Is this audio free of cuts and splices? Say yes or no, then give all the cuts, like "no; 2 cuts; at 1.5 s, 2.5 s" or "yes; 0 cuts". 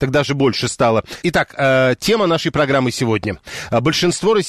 no; 1 cut; at 1.2 s